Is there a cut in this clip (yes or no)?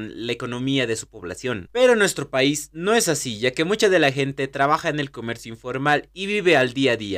no